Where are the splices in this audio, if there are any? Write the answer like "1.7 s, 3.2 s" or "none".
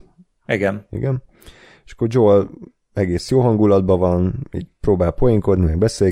none